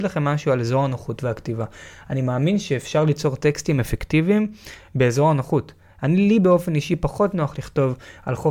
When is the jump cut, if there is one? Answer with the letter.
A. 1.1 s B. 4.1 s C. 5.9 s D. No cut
C